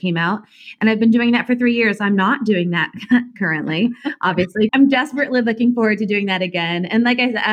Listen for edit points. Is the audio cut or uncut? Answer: cut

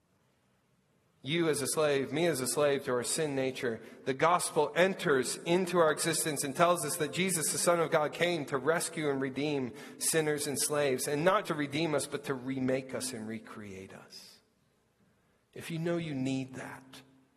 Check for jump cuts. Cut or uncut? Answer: cut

